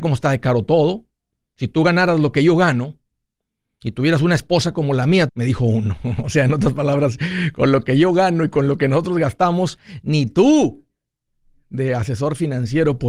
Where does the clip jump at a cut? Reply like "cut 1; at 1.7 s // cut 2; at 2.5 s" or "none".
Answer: cut 1; at 5.3 s